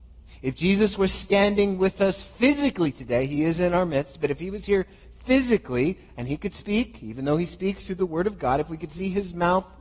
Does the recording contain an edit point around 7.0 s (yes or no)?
no